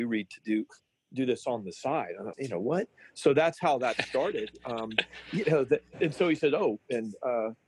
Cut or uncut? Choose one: cut